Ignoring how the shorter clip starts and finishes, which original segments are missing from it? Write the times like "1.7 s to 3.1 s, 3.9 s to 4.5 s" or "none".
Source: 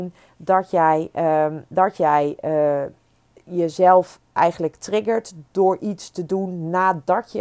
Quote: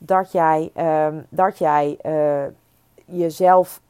none